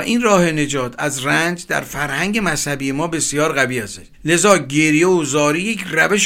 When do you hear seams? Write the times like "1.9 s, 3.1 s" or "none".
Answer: 4.1 s